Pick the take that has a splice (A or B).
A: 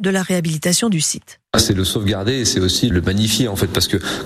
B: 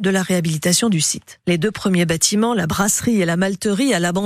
B